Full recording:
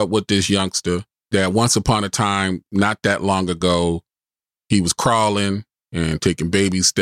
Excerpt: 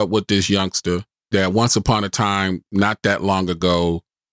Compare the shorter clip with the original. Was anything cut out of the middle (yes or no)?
no